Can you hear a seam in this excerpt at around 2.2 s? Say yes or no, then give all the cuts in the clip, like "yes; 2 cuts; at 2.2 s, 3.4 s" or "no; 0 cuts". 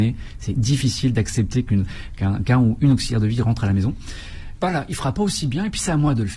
no; 1 cut; at 4.5 s